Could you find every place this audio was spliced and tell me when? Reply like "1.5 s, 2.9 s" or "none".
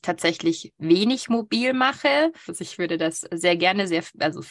2.5 s